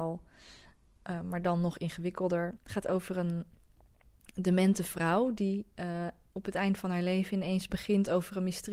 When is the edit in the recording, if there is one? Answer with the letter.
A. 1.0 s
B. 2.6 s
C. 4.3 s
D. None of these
B